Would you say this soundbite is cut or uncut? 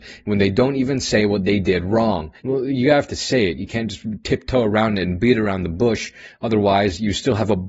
cut